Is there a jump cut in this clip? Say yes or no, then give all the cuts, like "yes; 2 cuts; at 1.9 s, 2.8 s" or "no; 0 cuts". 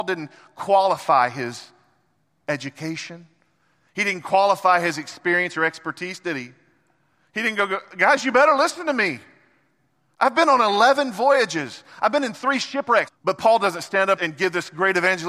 yes; 3 cuts; at 12.0 s, 13.1 s, 14.2 s